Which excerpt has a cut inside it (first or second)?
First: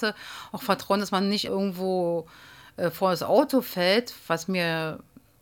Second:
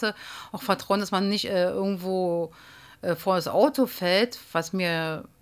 first